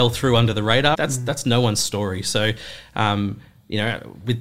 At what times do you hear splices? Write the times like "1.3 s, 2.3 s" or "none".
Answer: 0.9 s